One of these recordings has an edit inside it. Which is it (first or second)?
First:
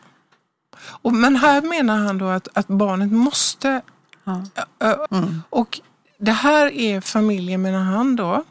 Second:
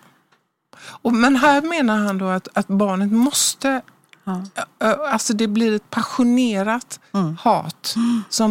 first